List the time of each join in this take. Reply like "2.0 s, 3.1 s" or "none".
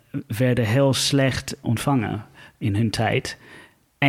1.6 s

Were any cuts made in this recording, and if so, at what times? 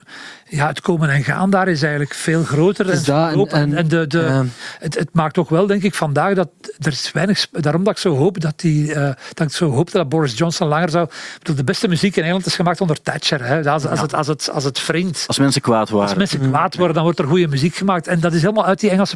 none

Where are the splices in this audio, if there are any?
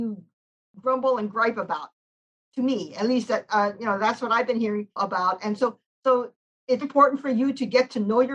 5.0 s, 6.8 s

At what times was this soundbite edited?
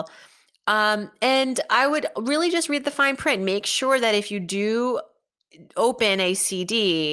none

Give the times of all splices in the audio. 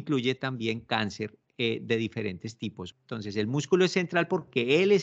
2.9 s

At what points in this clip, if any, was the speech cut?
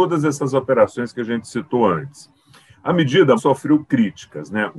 3.4 s

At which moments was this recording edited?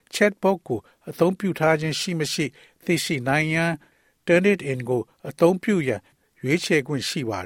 none

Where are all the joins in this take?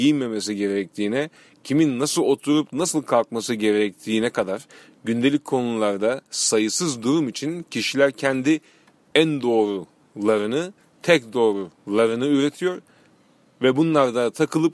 none

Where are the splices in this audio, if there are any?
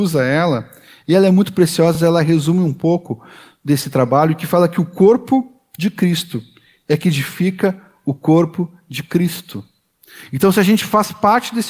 none

